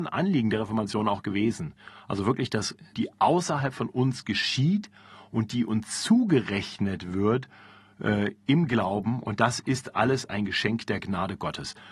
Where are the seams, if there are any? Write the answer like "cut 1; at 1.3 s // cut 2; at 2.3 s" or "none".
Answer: cut 1; at 2.9 s